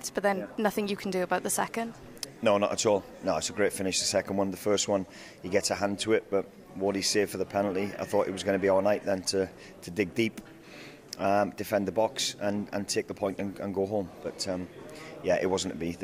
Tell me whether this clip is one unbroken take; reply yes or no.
yes